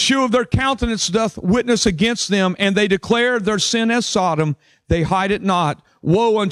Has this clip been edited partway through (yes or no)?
no